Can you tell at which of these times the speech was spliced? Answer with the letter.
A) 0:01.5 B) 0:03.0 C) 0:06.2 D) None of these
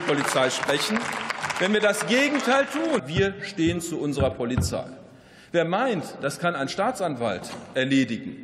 B